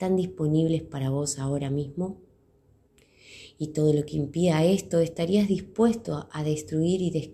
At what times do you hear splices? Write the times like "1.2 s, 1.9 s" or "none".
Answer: none

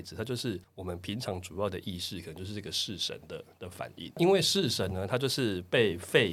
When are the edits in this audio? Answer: none

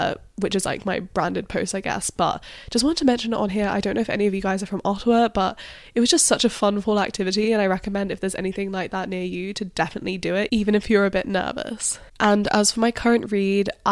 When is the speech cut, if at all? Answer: none

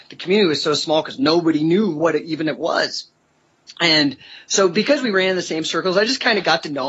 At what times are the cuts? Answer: none

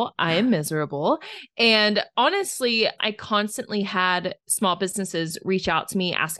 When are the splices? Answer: 3.0 s, 4.4 s

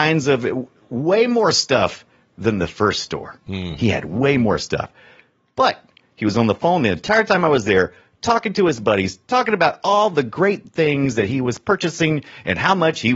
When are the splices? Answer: none

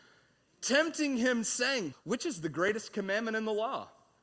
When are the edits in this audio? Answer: 1.9 s

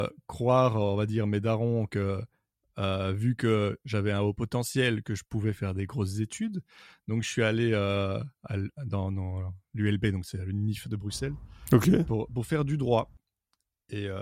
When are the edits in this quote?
none

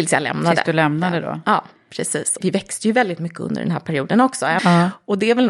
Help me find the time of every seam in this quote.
2.4 s, 4.6 s

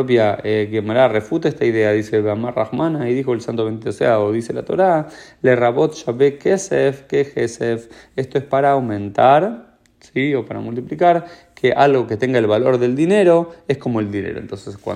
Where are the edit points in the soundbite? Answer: none

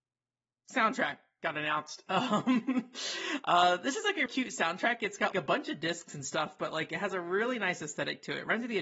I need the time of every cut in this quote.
4.3 s, 5.3 s

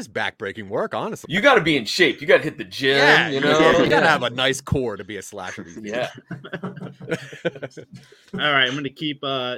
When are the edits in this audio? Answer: 1.3 s

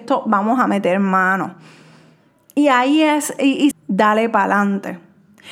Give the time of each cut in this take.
3.7 s

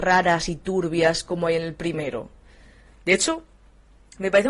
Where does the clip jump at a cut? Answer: 2.9 s

